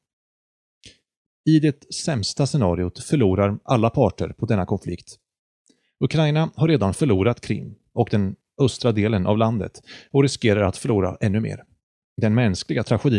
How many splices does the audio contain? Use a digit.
1